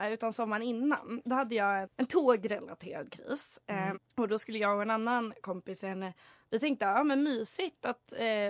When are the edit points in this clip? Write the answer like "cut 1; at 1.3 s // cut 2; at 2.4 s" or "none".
cut 1; at 1.8 s // cut 2; at 3.9 s